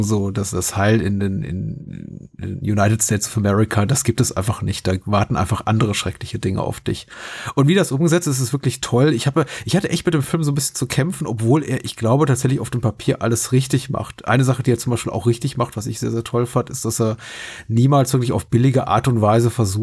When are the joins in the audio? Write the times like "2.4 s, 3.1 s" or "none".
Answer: none